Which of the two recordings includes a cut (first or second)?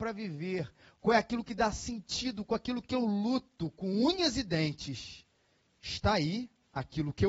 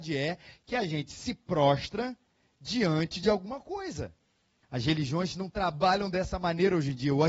second